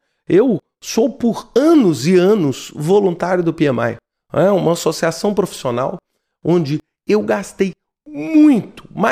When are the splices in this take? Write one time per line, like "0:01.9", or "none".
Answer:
none